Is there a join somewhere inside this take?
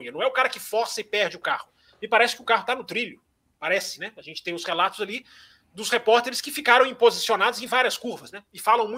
no; 0 cuts

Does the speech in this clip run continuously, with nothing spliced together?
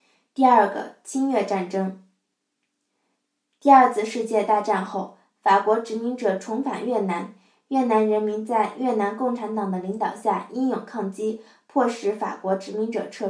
yes; 0 cuts

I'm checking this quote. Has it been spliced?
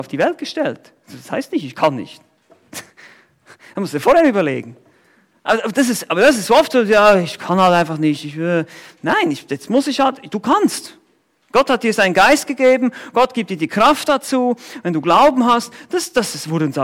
no; 0 cuts

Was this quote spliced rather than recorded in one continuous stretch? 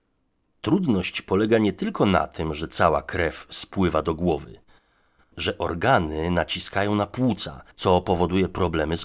yes; 2 cuts; at 5.3 s, 7.7 s

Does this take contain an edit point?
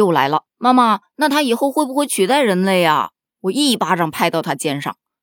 no; 0 cuts

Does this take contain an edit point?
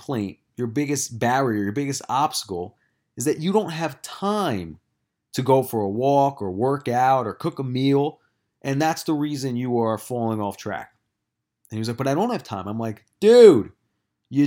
no; 0 cuts

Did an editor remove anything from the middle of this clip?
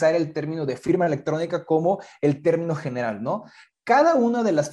no; 0 cuts

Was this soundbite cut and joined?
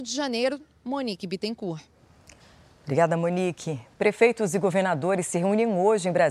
no; 0 cuts

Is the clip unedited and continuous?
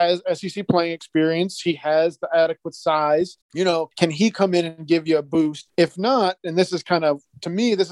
no; 1 cut; at 3.4 s

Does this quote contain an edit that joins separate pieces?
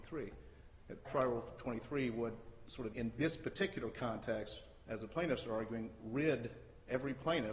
yes; 2 cuts; at 1.0 s, 2.9 s

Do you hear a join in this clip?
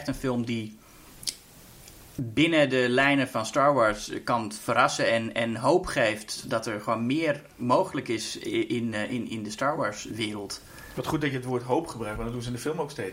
no; 0 cuts

